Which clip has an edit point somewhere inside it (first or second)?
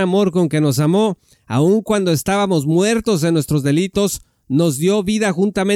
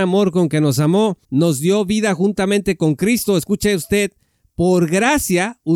second